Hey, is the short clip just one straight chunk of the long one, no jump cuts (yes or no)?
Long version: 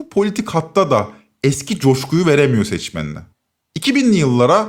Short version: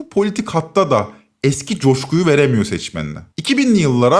no